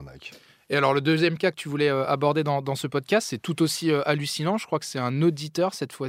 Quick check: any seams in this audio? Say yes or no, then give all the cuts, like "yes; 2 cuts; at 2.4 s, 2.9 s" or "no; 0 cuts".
no; 0 cuts